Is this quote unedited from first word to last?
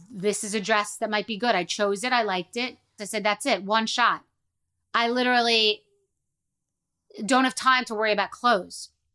no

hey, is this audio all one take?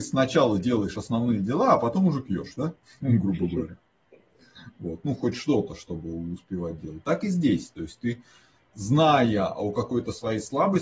yes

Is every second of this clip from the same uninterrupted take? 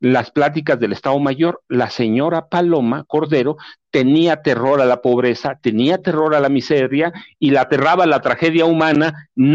yes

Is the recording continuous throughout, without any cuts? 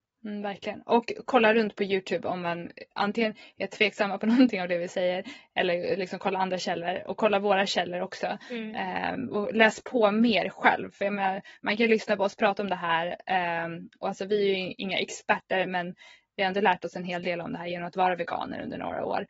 yes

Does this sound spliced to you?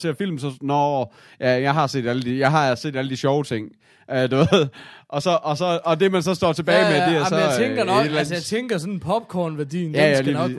no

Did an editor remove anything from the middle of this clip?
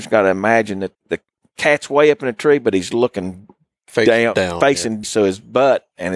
yes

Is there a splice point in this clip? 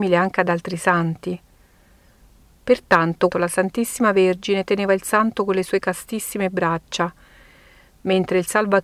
yes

